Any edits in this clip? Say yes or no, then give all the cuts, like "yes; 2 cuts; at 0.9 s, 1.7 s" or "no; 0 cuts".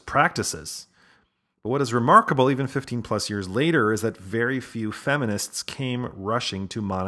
no; 0 cuts